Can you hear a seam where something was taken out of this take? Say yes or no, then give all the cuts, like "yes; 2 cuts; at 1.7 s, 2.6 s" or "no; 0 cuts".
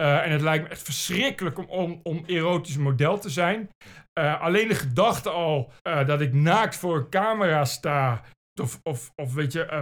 yes; 2 cuts; at 5.8 s, 8.6 s